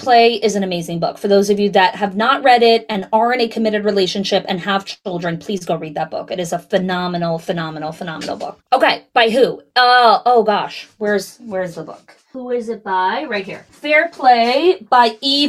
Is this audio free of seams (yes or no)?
yes